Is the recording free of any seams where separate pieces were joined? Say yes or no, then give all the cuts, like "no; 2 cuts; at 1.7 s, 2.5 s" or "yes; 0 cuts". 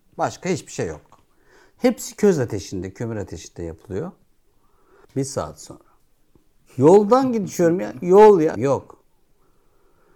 no; 2 cuts; at 5.0 s, 8.6 s